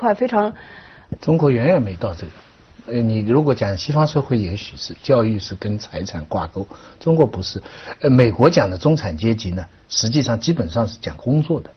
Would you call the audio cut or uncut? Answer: cut